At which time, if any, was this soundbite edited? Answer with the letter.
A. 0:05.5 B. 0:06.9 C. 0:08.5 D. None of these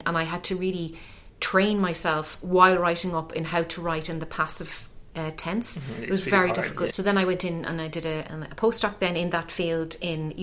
B